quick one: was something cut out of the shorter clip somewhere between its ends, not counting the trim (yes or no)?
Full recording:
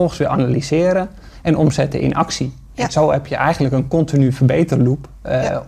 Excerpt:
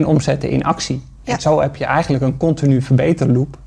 no